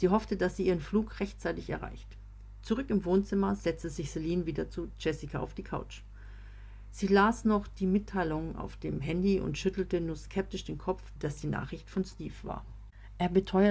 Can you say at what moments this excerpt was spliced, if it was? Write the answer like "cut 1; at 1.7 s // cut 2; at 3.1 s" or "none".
cut 1; at 11.2 s